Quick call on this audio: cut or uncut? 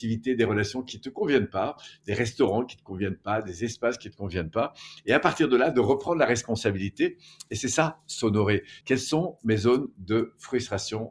cut